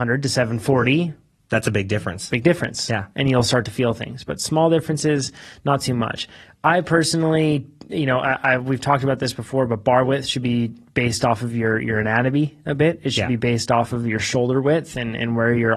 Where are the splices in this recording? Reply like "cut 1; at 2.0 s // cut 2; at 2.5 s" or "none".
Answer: none

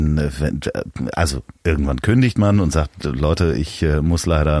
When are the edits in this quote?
none

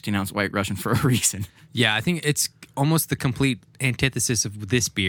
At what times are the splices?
none

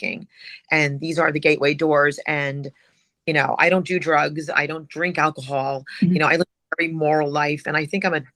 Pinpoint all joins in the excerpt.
none

